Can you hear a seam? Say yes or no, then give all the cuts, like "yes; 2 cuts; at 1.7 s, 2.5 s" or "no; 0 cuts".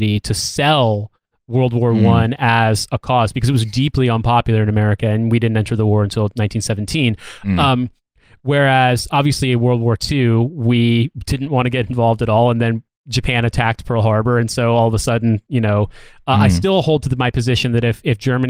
no; 0 cuts